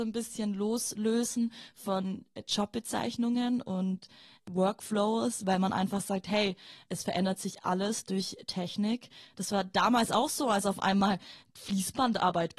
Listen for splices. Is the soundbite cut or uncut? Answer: uncut